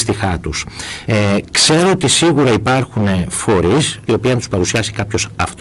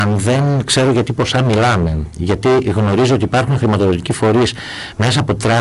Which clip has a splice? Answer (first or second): first